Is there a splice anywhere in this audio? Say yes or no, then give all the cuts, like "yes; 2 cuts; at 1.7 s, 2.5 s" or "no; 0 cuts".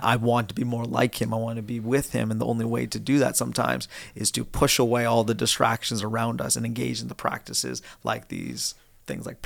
no; 0 cuts